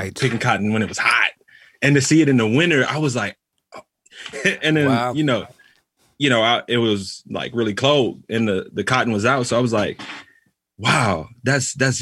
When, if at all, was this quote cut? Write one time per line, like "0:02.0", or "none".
0:04.3